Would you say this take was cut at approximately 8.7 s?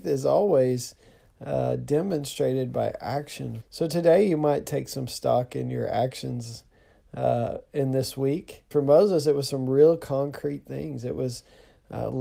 yes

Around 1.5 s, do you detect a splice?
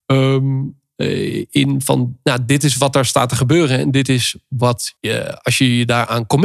no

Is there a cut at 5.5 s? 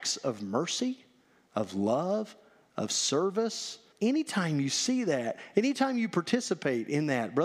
yes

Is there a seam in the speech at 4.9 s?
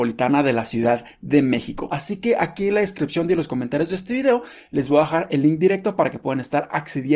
no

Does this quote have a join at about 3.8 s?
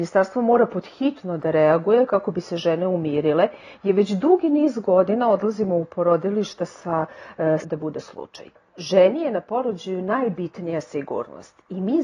no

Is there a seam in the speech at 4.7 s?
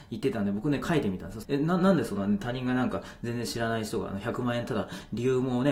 no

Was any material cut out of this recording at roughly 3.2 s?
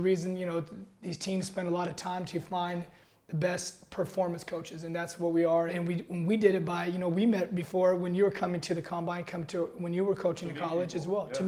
no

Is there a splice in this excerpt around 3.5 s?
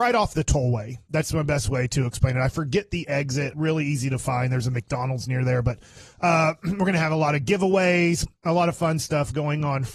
yes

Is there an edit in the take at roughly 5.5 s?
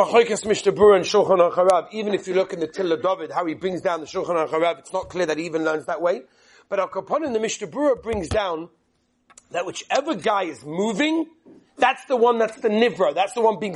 no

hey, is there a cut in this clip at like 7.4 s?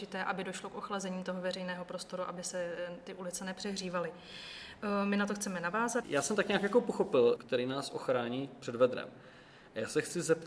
yes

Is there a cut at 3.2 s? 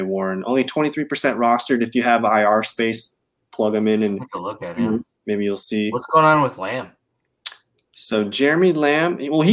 no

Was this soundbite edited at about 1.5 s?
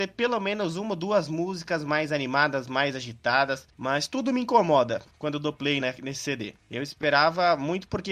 no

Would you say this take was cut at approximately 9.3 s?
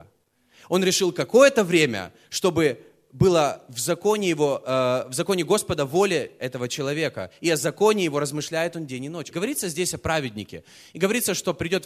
yes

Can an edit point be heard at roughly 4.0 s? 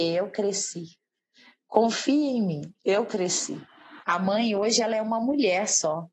yes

